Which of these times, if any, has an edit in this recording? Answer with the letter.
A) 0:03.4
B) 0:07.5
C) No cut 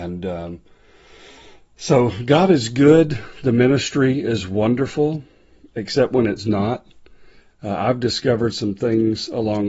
B